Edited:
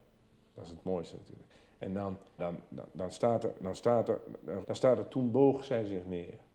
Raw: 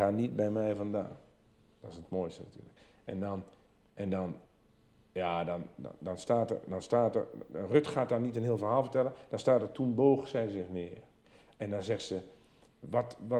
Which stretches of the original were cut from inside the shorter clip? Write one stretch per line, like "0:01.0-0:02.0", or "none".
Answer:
0:03.6-0:05.4
0:07.7-0:09.2